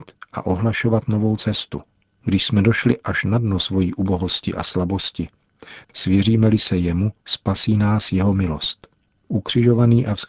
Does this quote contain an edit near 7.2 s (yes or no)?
yes